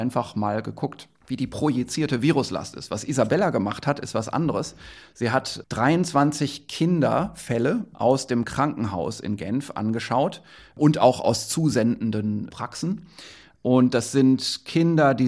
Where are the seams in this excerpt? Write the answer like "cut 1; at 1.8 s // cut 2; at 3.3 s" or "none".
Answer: none